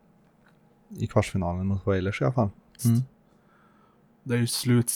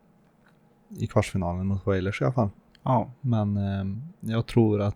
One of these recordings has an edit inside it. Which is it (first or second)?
first